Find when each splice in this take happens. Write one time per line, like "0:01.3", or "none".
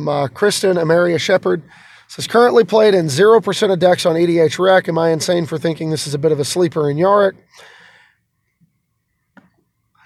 0:09.1